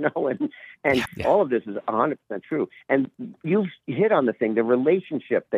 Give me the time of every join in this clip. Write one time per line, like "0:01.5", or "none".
0:01.1
0:02.8